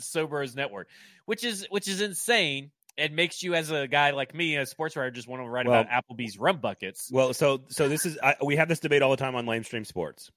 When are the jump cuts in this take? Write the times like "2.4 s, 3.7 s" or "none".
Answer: none